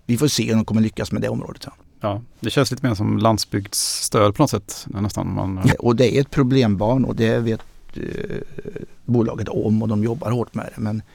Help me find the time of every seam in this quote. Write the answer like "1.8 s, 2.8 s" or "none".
5.7 s, 7.1 s